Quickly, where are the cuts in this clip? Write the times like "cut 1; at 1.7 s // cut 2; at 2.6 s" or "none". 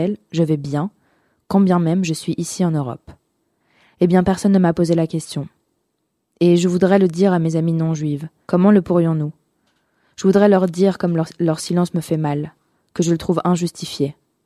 cut 1; at 8.4 s